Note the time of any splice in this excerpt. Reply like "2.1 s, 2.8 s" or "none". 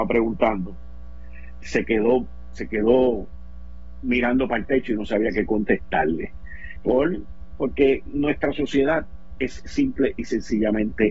1.6 s, 6.8 s